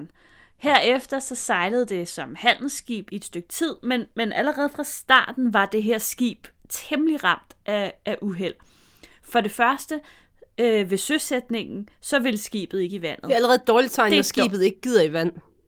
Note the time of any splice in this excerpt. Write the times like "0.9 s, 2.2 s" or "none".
3.1 s